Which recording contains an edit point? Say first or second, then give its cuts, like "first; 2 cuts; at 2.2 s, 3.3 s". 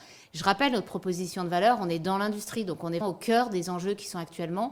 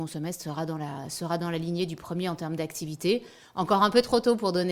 first; 1 cut; at 3.0 s